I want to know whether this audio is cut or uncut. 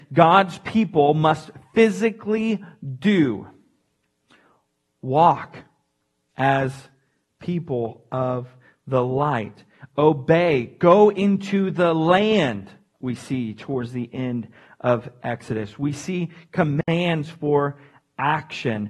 uncut